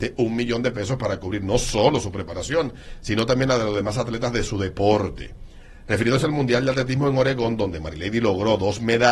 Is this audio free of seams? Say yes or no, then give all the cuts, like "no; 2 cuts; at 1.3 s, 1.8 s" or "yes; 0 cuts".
yes; 0 cuts